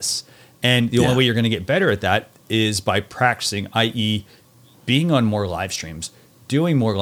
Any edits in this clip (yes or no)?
no